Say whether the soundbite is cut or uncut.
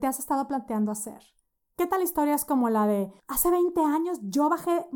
uncut